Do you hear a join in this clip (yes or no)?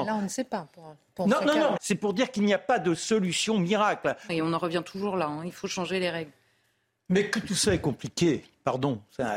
yes